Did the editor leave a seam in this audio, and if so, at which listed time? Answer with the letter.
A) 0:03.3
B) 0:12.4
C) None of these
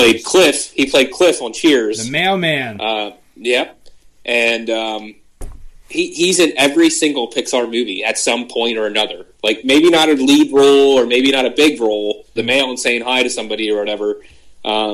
B